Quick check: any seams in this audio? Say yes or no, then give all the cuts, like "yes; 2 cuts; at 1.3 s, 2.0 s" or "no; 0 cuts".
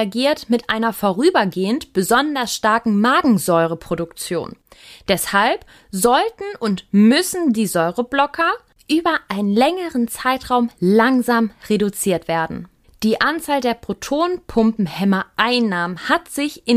yes; 1 cut; at 12.8 s